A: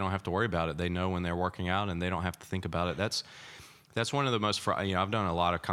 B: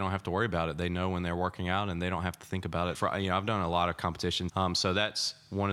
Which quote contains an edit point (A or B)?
B